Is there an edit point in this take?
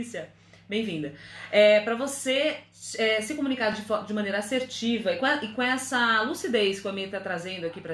no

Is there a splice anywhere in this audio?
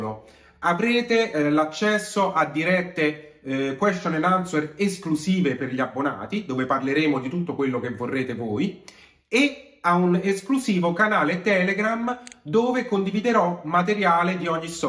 no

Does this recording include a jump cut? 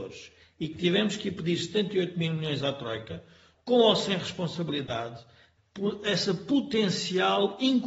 yes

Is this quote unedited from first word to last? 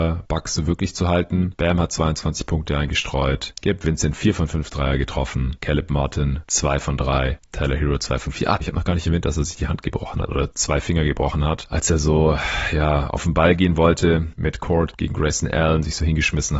no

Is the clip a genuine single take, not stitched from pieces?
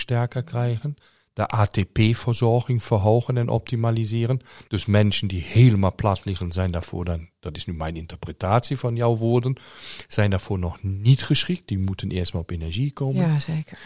no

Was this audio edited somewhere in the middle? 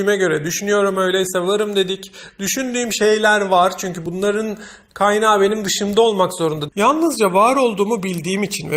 yes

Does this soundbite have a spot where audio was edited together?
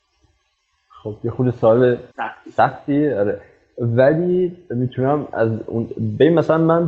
yes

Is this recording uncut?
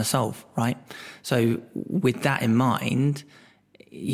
yes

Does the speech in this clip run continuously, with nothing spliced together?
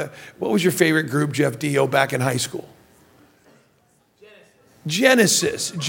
yes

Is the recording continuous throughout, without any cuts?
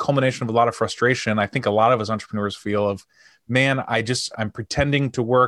yes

